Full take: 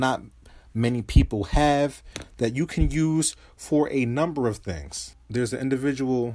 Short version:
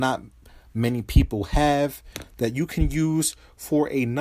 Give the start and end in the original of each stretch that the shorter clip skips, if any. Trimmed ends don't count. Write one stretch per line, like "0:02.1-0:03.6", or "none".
none